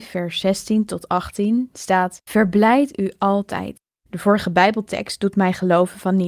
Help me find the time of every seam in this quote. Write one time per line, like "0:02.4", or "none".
0:02.2
0:03.9